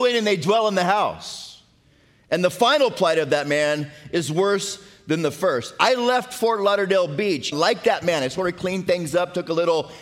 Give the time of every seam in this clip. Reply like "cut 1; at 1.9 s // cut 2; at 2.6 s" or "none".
cut 1; at 7.5 s